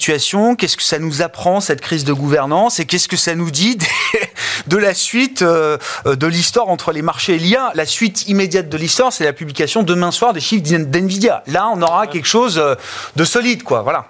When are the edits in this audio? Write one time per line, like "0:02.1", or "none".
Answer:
none